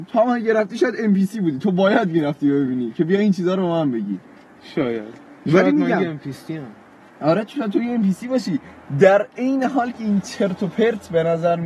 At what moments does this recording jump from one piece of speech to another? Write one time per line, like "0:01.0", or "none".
none